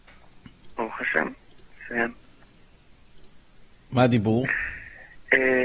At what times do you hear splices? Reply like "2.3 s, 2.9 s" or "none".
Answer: none